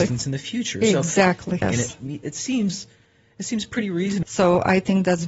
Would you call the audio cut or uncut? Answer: cut